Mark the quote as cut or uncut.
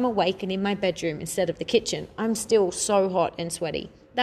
uncut